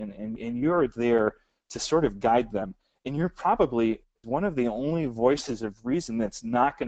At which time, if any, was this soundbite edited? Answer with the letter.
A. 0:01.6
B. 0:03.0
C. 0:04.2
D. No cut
C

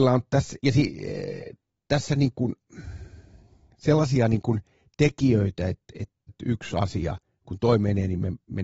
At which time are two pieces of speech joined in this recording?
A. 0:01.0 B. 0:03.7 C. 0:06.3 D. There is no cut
C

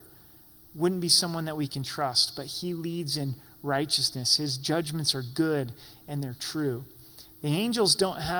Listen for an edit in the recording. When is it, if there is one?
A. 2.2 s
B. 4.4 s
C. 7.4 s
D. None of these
D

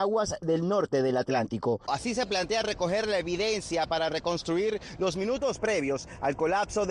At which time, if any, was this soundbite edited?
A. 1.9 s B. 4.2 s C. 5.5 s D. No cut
A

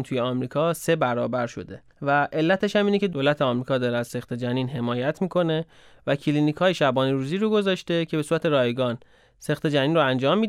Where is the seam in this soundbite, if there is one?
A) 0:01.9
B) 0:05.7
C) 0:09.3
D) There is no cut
A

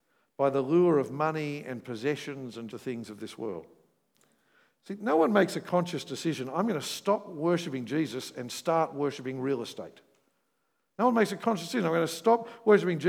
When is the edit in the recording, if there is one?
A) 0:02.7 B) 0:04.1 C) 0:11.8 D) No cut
A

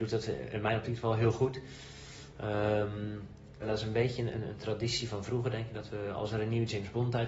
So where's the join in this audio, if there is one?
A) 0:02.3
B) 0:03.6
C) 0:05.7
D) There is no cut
B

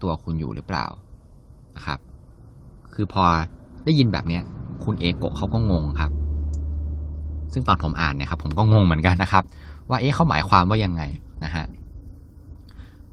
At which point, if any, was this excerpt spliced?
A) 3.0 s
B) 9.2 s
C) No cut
B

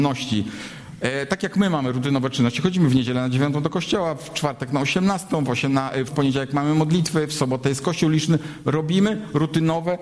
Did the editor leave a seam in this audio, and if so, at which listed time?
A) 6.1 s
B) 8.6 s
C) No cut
A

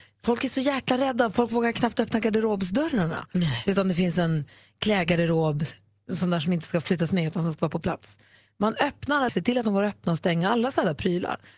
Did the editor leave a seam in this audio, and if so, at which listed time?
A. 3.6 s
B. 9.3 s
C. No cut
B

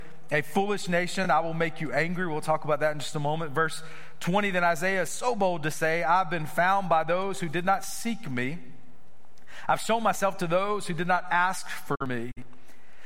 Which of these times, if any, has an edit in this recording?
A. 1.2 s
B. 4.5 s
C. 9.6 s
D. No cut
D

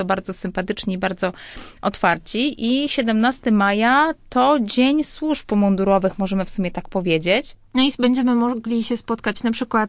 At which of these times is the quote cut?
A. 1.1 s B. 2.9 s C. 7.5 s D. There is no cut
C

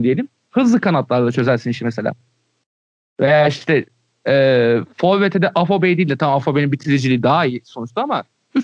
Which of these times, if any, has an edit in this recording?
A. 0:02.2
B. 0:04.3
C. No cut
C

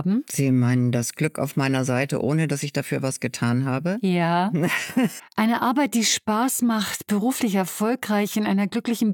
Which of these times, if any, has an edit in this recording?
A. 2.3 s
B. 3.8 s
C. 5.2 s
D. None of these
C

